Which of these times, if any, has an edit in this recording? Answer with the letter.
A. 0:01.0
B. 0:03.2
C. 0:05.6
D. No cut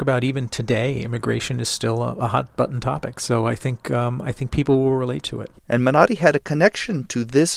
C